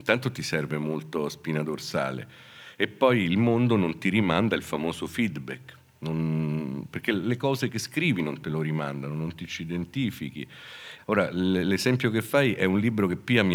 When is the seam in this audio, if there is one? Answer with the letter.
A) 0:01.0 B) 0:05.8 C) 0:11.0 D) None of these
C